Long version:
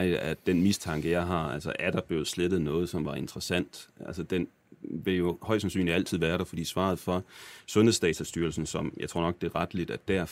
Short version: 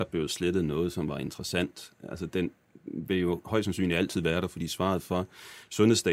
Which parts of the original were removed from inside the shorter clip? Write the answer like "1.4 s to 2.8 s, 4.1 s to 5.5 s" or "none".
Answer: none

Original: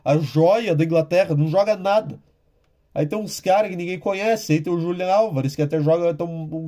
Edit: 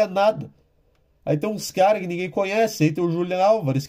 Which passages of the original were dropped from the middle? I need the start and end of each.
none

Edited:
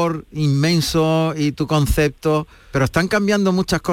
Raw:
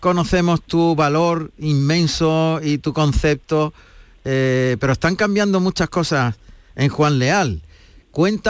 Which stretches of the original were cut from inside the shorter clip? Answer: 4.0 s to 4.8 s

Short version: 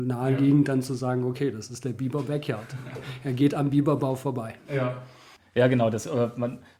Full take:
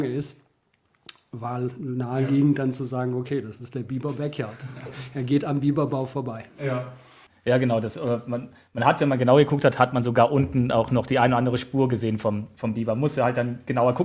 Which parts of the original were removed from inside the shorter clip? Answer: none

